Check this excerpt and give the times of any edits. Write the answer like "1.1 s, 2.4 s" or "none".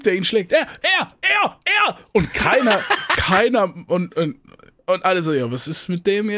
none